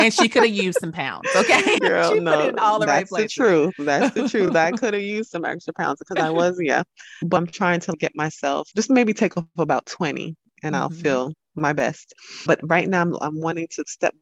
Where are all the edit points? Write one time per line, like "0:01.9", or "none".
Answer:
none